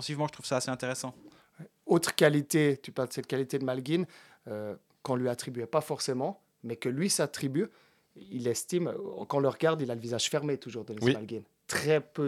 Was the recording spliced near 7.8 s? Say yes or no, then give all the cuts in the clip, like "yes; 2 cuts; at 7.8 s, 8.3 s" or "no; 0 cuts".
no; 0 cuts